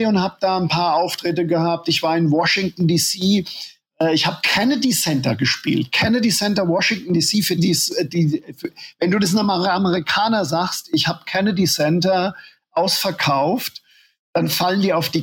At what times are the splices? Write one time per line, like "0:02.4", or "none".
0:07.6